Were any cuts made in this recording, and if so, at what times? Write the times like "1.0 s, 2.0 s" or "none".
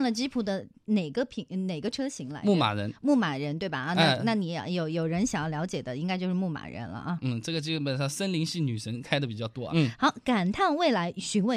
9.7 s

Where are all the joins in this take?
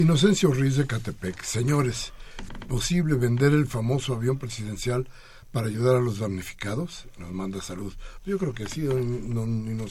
2.5 s

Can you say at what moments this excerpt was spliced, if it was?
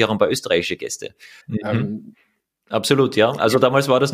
1.4 s

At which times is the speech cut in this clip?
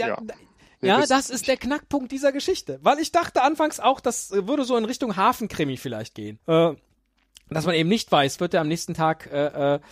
6.4 s, 8.4 s

